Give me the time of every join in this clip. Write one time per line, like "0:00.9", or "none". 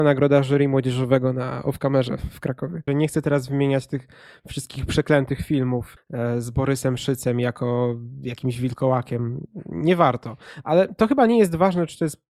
0:02.9